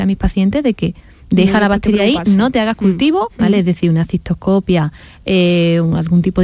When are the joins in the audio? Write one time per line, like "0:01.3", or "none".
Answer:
0:03.3